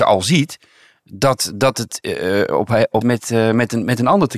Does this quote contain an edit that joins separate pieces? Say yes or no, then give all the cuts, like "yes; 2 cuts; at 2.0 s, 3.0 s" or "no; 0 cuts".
yes; 1 cut; at 3.0 s